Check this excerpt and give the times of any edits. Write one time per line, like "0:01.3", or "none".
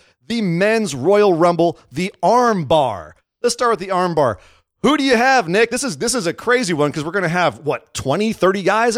none